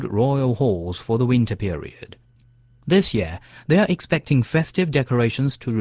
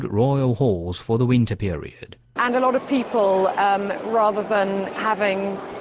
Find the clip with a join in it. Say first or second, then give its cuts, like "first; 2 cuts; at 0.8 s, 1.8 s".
second; 1 cut; at 2.4 s